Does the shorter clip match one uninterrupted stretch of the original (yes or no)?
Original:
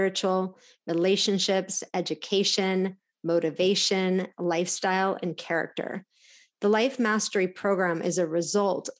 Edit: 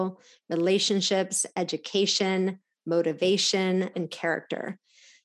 no